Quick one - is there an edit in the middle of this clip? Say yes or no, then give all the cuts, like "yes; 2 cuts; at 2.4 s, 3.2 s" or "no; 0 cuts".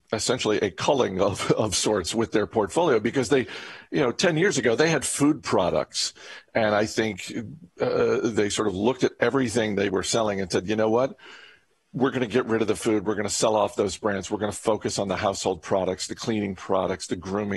no; 0 cuts